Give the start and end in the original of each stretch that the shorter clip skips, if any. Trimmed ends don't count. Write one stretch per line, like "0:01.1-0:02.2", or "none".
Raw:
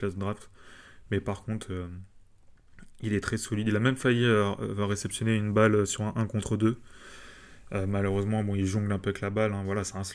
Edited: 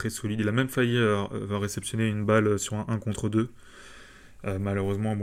none